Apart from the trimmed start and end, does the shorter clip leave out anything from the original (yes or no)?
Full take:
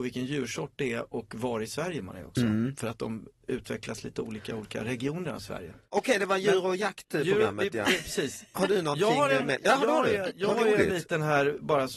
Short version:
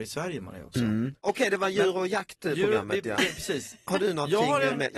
yes